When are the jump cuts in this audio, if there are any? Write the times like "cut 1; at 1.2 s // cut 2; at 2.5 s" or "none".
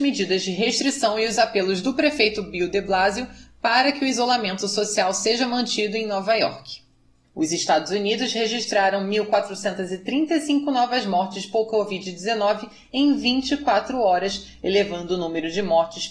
cut 1; at 7.2 s